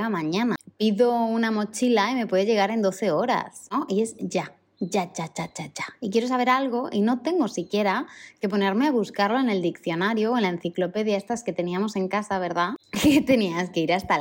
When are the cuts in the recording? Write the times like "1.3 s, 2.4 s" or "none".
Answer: none